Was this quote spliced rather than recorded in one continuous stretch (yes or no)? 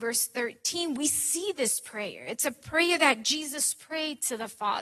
no